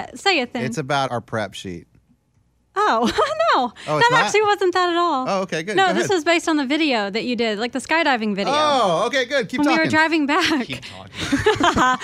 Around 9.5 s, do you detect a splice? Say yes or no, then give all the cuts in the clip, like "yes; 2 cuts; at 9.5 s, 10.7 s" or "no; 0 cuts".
no; 1 cut; at 1.1 s